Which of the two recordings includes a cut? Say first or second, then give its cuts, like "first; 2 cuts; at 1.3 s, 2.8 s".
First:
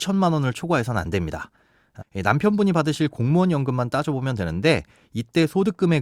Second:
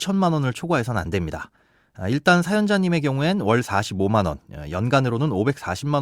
first; 1 cut; at 2.0 s